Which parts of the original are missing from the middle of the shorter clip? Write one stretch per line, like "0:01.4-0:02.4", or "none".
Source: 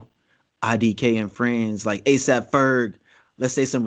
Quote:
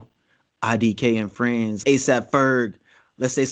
0:01.8-0:02.0